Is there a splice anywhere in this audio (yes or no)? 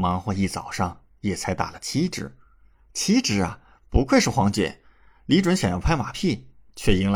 no